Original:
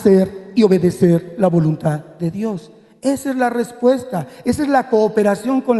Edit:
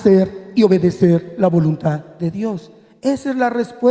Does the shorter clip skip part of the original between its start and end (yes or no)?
no